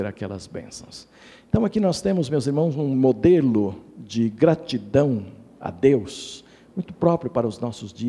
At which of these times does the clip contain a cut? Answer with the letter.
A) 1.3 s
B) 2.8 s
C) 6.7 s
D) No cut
D